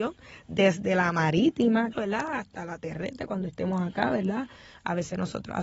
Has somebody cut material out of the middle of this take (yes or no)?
yes